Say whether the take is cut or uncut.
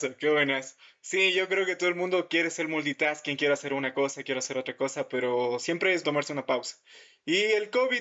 cut